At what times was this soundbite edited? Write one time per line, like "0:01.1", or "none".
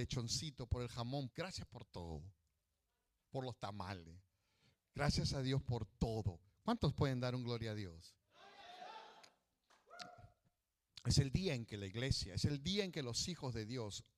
0:01.3